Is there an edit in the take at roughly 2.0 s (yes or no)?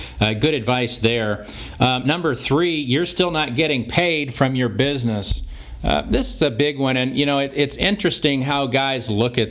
no